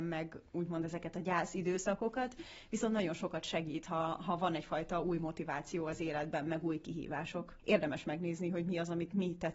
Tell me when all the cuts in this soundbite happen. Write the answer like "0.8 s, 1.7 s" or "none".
7.6 s